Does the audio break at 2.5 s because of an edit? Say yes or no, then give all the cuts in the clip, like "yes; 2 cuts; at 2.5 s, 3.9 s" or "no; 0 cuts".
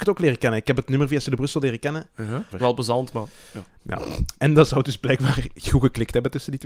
yes; 1 cut; at 2.5 s